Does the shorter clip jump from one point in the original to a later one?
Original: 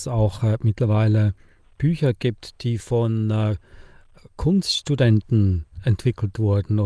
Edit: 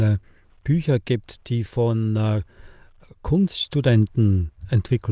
no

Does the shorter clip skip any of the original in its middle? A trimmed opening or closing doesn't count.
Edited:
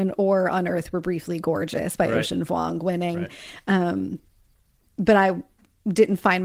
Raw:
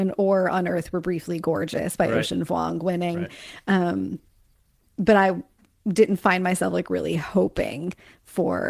no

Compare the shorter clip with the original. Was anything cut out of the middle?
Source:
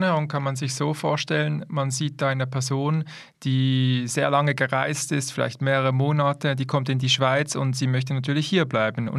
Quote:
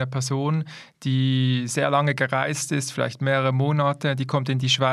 no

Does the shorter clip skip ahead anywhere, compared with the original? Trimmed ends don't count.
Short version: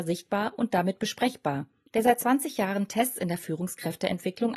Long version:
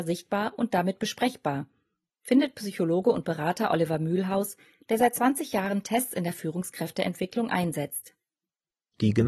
yes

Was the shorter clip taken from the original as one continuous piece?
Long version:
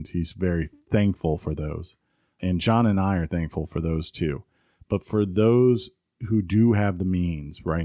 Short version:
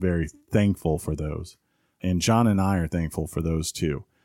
yes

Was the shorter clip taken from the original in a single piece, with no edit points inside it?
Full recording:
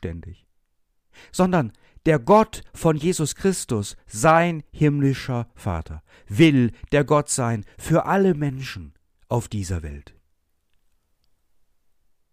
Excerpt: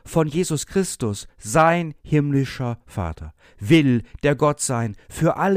yes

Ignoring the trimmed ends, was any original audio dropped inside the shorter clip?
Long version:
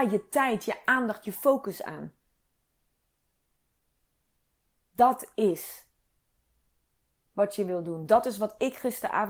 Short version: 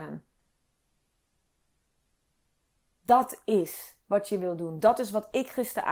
yes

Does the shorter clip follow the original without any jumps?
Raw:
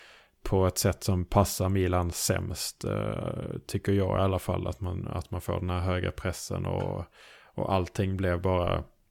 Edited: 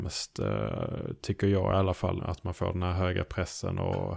no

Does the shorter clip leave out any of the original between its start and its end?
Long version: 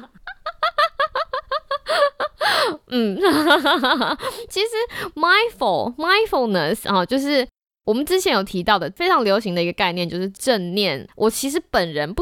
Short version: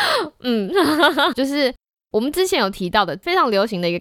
yes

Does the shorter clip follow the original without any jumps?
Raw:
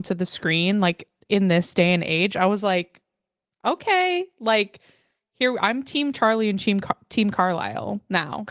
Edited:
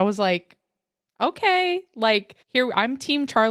no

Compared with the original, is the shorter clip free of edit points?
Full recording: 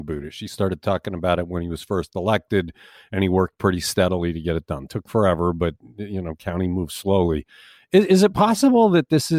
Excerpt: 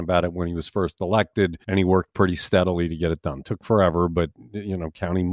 no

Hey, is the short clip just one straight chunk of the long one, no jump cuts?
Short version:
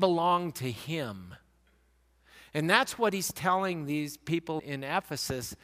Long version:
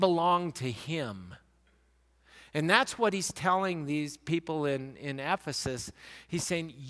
no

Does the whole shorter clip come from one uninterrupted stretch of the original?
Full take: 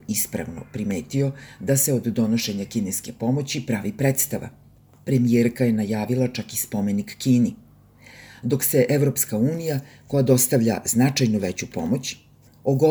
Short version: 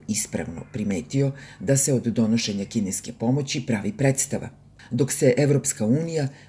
no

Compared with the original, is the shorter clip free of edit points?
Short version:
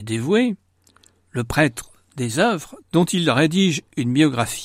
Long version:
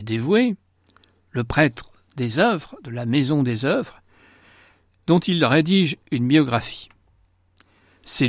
no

